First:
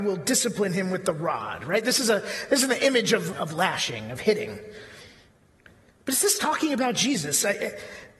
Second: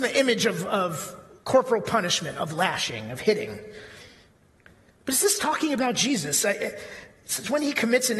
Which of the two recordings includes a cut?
first; 1 cut; at 3.3 s

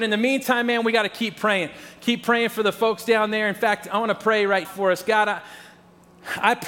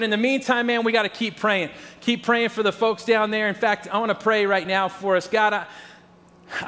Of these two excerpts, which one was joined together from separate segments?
first; 1 cut; at 4.6 s

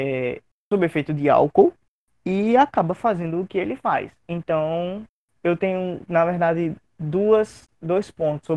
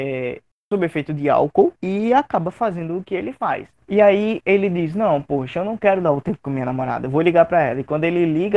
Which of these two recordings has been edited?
second; 2 cuts; at 1.8 s, 3.7 s

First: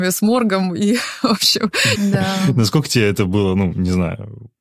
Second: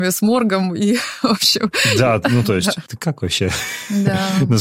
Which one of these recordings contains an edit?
first; 1 cut; at 1.9 s

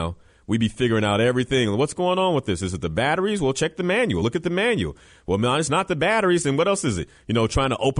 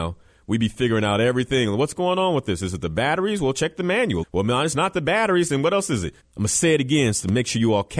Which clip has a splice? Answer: second; 2 cuts; at 4.2 s, 6.2 s

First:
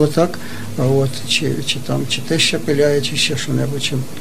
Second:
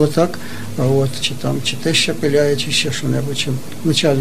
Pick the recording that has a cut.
second; 1 cut; at 1.2 s

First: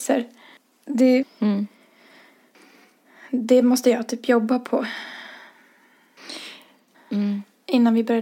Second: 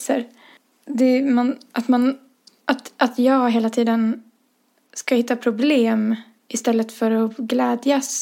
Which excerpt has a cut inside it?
first; 2 cuts; at 1.2 s, 6.9 s

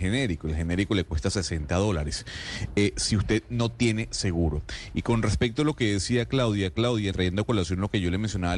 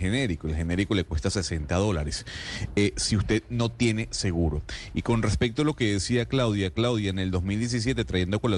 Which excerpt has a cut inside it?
first; 1 cut; at 7.1 s

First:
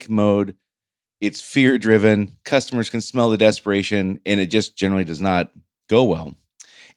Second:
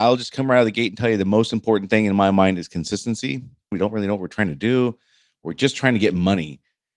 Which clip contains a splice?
second; 1 cut; at 3.7 s

